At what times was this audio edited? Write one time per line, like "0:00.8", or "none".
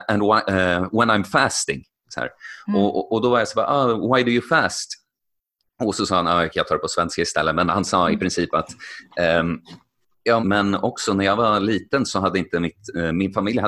0:10.4

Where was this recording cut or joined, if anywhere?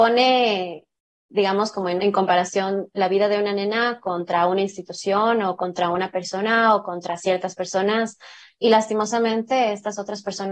0:02.0

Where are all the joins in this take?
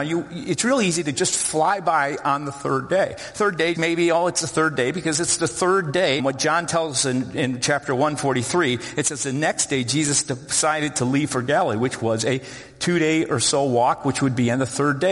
0:03.7
0:06.2

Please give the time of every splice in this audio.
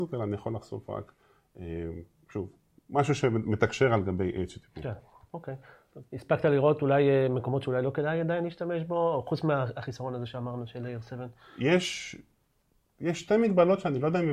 none

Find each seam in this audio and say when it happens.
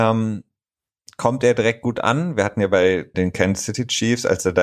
0:03.1

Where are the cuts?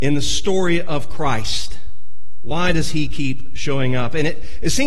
none

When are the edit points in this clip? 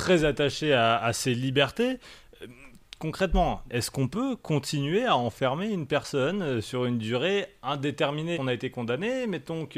0:03.7
0:08.3

